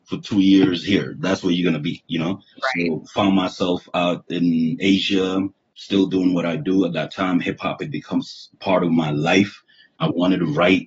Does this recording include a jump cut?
yes; 1 cut; at 2.5 s

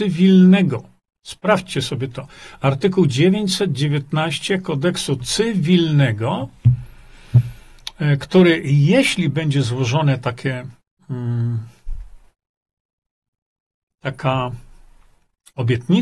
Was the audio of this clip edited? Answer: no; 0 cuts

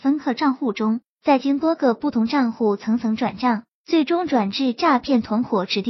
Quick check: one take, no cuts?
yes; 0 cuts

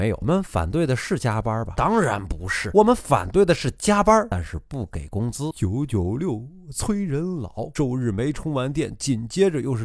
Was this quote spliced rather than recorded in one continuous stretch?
no; 0 cuts

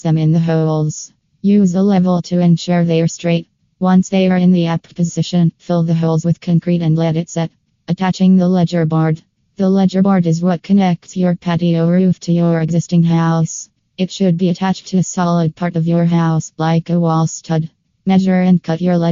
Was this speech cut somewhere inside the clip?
no; 0 cuts

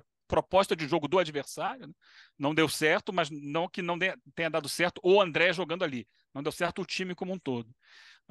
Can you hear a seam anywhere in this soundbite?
no; 0 cuts

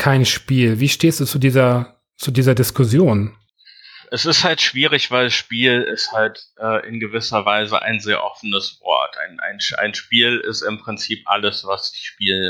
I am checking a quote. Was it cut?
no; 0 cuts

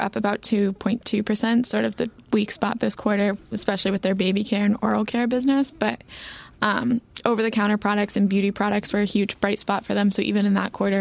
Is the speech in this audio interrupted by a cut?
no; 0 cuts

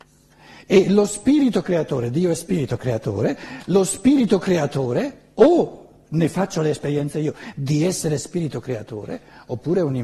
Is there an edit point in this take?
no; 0 cuts

